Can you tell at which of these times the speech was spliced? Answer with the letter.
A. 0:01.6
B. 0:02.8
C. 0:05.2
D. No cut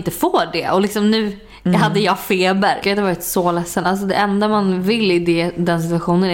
B